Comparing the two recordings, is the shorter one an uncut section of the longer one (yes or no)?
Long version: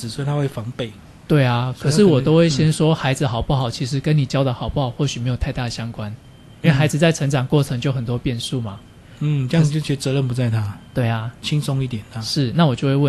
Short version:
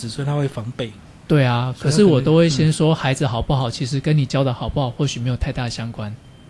yes